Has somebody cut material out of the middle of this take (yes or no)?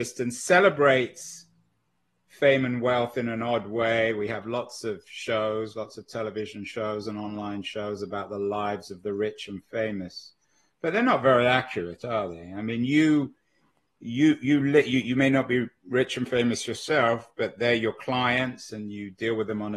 no